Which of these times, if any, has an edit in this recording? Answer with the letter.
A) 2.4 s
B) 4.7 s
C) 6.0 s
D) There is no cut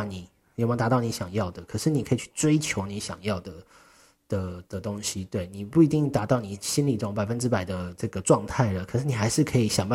B